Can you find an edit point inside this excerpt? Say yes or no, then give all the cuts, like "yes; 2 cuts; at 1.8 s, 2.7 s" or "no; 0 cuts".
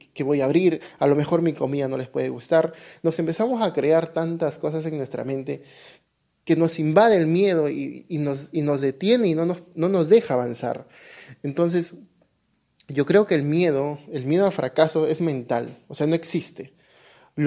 no; 0 cuts